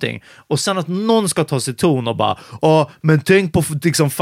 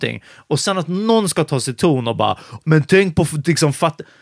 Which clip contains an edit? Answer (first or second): second